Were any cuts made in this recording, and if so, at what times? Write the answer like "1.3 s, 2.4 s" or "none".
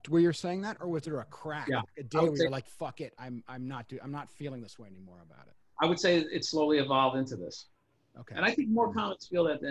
2.6 s